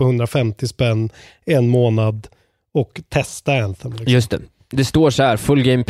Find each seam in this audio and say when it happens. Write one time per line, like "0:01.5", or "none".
none